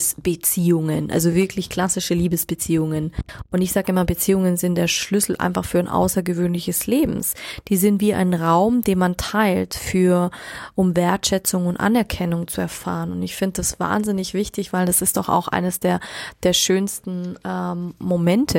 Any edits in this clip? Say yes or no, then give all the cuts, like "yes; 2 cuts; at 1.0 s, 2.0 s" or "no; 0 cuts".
no; 0 cuts